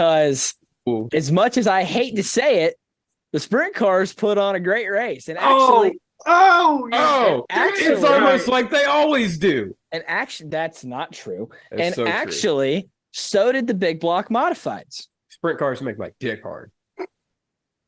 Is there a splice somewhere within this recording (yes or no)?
no